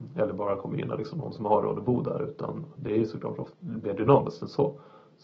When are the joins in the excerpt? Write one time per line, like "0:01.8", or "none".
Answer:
0:03.5